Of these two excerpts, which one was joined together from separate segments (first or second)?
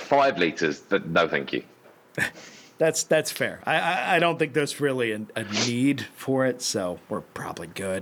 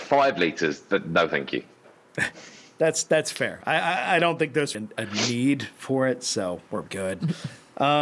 second